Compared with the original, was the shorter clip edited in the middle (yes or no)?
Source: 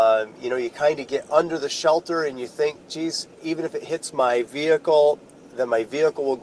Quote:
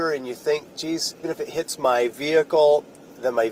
yes